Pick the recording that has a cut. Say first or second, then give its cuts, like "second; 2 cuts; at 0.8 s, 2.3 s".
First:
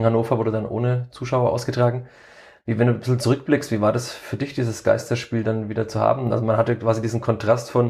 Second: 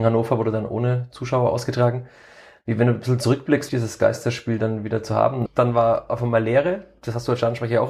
second; 2 cuts; at 3.7 s, 5.5 s